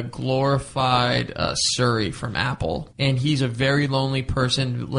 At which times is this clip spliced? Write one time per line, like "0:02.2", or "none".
0:02.9